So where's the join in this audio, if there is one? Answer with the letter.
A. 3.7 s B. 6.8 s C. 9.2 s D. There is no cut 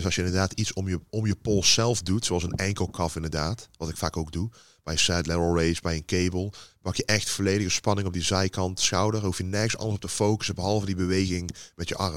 D